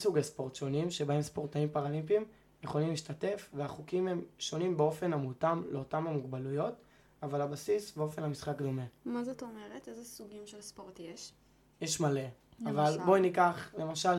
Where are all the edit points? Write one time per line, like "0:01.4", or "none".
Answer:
none